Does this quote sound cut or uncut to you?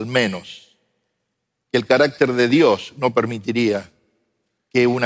uncut